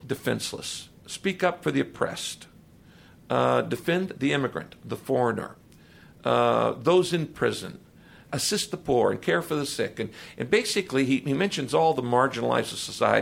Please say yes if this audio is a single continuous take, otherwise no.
no